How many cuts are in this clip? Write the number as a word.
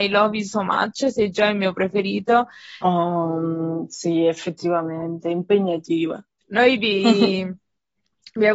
one